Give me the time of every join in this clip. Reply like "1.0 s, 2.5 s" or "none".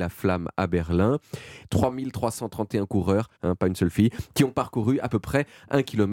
1.6 s, 3.4 s